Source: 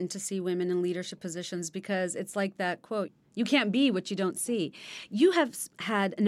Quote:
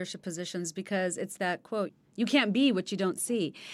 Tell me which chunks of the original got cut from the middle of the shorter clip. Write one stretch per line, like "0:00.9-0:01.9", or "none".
0:02.3-0:02.5